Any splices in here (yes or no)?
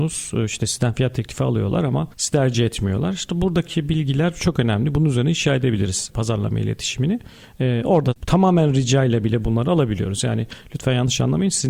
yes